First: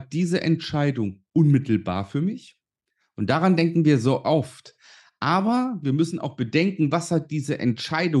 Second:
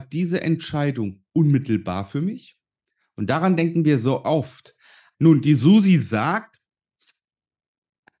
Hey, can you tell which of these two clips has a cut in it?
second; 1 cut; at 5.1 s

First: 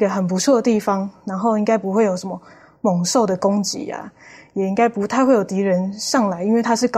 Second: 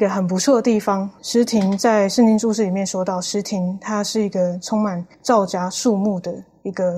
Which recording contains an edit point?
second; 2 cuts; at 1.2 s, 5.1 s

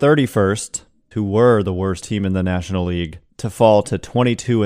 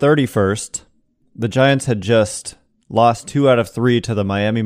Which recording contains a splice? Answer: first; 2 cuts; at 1.1 s, 3.3 s

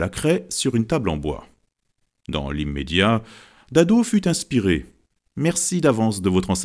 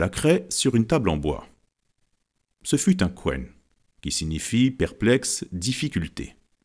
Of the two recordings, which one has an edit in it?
first; 2 cuts; at 2.1 s, 5.2 s

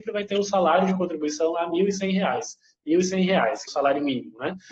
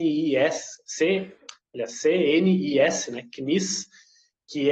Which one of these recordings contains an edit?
first; 1 cut; at 3.7 s

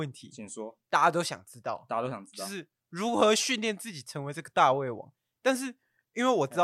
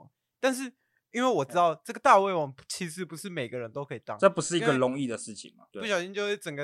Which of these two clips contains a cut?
second; 1 cut; at 5.7 s

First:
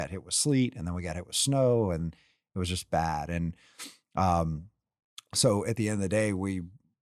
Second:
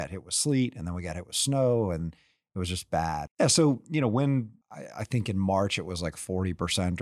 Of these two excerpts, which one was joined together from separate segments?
second; 2 cuts; at 3.3 s, 4.6 s

